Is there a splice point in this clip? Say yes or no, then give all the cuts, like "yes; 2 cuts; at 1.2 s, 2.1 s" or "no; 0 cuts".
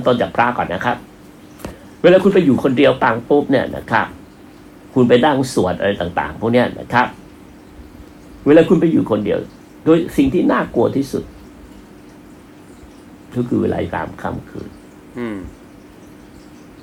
no; 0 cuts